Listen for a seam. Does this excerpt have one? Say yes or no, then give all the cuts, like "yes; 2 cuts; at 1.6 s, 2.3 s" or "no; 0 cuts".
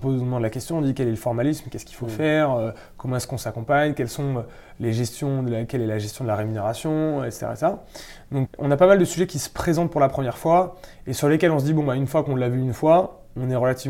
yes; 1 cut; at 8.5 s